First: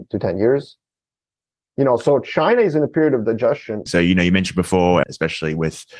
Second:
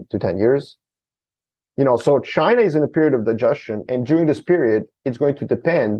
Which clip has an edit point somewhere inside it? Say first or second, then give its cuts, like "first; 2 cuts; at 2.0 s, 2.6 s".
first; 2 cuts; at 3.9 s, 5.0 s